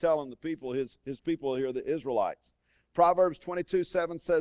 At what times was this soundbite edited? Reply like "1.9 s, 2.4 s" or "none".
none